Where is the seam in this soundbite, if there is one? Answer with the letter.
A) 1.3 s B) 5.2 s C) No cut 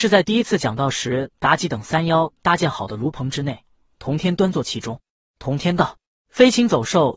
B